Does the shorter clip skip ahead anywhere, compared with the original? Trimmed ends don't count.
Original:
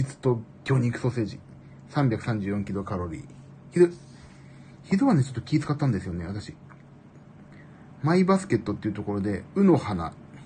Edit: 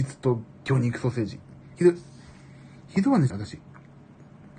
yes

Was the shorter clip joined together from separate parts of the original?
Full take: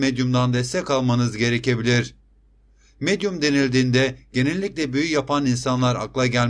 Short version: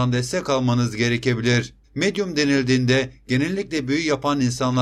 yes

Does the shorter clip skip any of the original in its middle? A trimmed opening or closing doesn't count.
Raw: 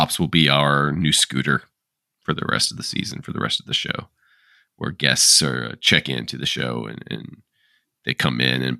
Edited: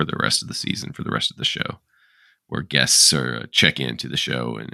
no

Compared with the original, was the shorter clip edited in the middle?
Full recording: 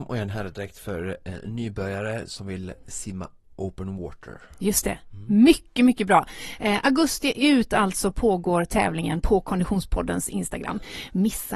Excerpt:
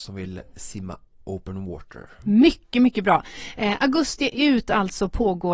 yes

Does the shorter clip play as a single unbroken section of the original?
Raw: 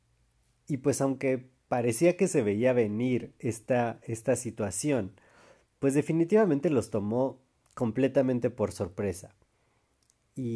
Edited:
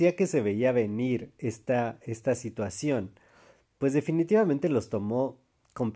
yes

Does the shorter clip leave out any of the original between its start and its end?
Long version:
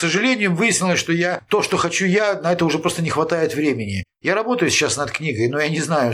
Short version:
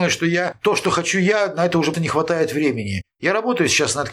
yes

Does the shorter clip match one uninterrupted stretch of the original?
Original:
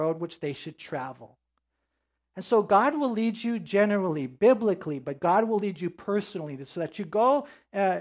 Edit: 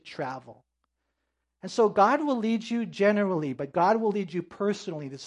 no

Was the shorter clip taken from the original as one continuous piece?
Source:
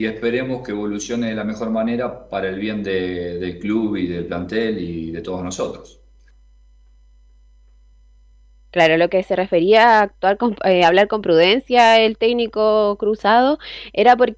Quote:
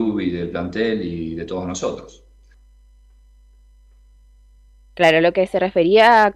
yes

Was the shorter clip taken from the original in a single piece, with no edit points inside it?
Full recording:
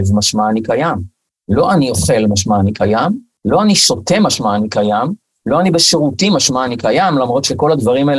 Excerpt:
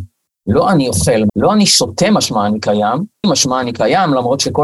no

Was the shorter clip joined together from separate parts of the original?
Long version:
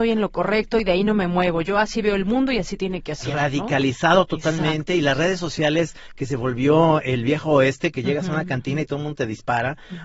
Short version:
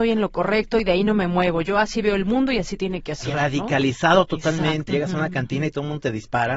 yes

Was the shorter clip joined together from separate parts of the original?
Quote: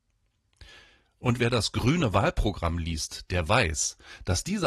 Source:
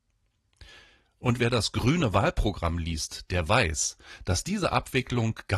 no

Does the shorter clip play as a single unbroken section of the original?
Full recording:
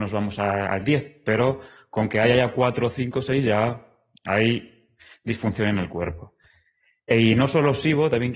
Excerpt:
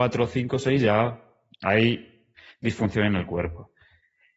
yes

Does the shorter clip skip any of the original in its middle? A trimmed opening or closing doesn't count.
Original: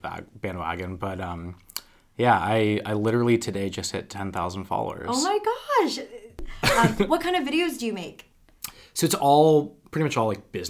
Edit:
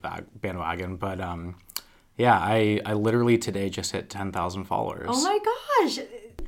no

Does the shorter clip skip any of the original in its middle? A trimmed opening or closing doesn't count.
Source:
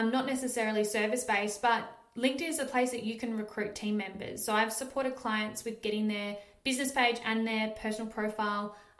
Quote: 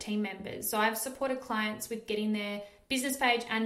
no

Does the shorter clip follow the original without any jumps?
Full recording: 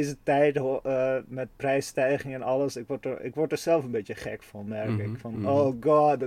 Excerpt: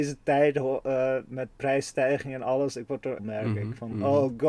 no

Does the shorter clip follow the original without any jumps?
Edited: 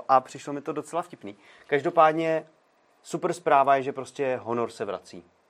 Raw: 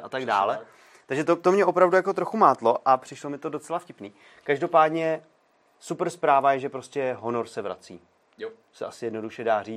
yes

